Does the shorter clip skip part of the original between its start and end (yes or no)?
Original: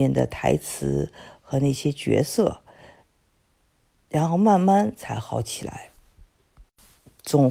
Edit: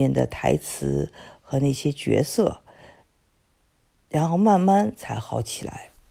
no